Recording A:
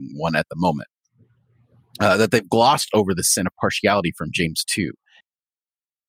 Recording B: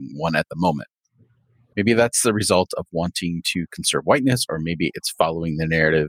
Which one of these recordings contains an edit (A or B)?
B